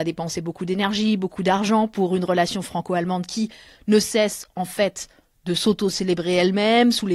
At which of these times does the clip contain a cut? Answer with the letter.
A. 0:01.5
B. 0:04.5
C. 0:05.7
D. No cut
D